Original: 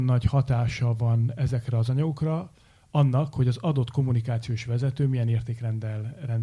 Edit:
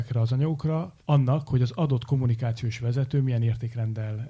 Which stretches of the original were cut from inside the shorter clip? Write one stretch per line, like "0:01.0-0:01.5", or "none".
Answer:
0:02.6-0:02.9